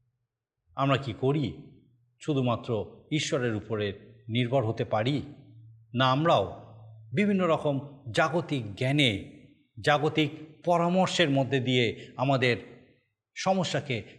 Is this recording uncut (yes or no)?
yes